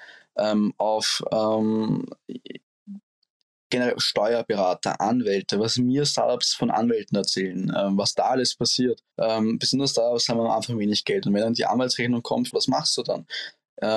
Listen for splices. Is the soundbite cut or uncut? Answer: cut